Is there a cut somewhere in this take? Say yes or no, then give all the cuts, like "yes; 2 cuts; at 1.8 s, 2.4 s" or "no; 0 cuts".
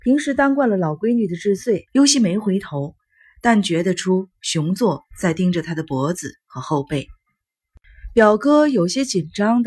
yes; 1 cut; at 1.9 s